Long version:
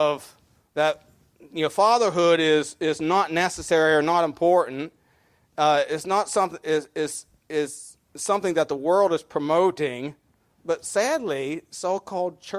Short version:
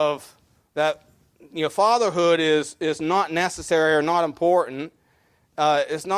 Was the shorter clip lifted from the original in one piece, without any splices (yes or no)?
yes